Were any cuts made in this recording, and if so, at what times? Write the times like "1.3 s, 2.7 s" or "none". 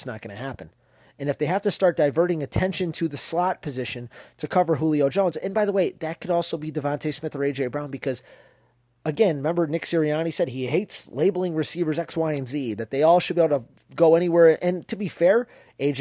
none